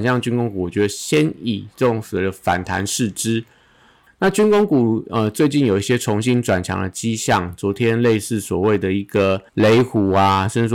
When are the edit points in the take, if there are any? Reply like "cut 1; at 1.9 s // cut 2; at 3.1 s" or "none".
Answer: cut 1; at 4.1 s // cut 2; at 9.5 s